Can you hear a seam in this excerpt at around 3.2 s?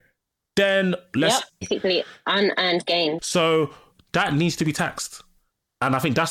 yes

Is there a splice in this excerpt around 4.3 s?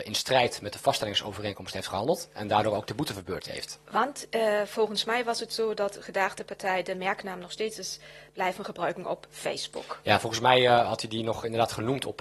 no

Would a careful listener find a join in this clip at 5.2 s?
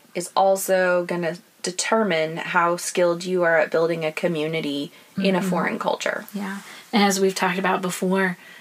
no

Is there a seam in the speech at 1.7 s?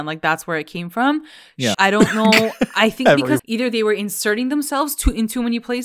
yes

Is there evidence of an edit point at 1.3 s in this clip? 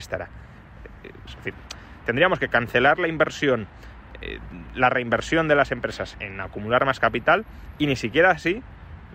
yes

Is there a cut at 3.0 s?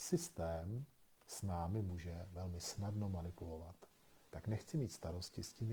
no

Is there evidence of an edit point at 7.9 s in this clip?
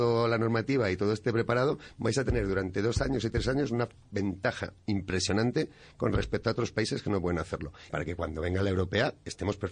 yes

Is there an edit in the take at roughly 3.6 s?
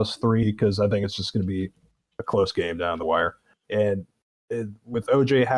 yes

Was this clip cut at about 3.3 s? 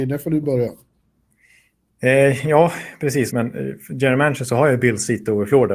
yes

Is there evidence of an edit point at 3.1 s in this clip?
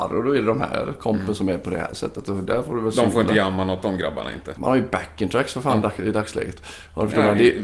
no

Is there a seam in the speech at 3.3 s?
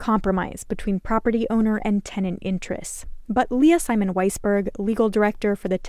no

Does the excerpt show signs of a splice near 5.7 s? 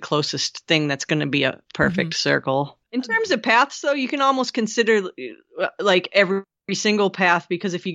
no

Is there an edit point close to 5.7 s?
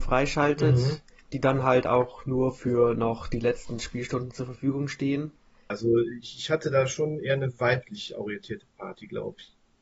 yes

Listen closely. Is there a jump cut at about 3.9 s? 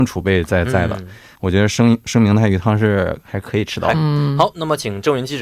yes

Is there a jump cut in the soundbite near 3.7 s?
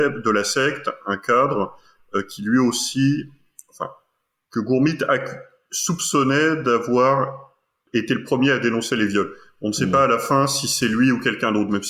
no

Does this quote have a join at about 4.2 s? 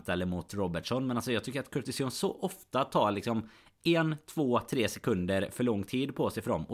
no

